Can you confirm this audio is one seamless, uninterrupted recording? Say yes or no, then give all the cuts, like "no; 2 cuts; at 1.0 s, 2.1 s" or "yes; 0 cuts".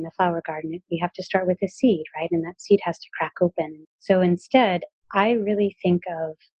no; 1 cut; at 3.9 s